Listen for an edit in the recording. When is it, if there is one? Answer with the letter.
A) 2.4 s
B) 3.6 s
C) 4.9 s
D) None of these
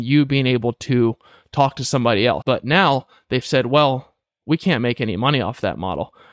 A